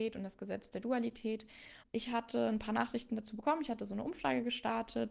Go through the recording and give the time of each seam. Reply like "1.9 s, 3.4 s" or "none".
1.8 s